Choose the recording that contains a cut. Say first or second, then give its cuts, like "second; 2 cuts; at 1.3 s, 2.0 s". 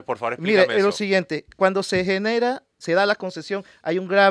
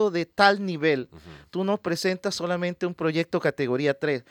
first; 1 cut; at 2.8 s